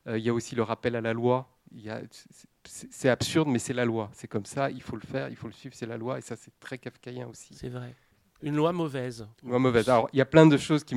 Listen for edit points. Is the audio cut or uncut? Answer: cut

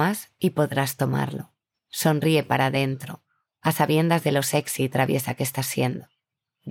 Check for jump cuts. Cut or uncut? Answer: uncut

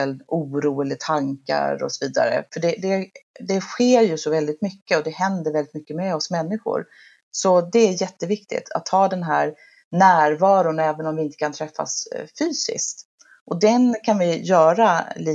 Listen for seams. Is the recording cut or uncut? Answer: cut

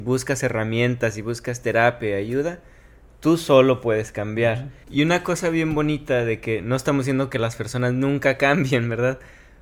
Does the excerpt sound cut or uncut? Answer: cut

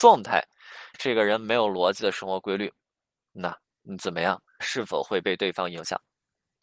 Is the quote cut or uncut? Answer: cut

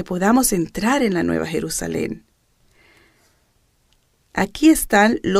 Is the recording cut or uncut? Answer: uncut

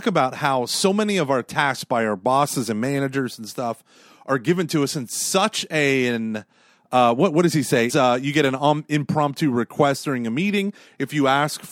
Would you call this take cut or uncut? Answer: cut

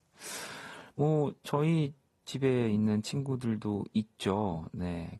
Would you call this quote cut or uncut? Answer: uncut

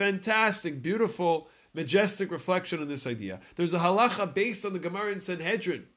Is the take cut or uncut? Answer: uncut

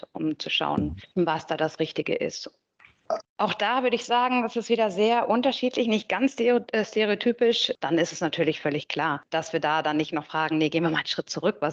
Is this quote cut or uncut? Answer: cut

